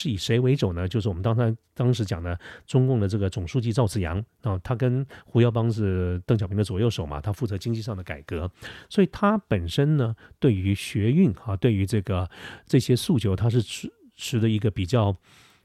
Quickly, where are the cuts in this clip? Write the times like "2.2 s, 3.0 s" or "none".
none